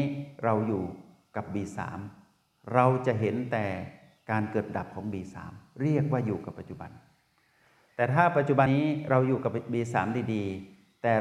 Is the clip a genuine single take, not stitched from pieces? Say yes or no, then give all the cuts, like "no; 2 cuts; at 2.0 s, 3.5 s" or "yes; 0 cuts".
no; 1 cut; at 8.7 s